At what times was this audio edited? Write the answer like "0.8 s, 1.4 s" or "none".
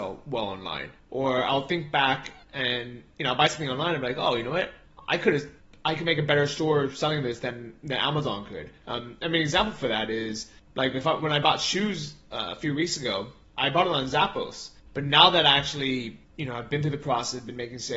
14.9 s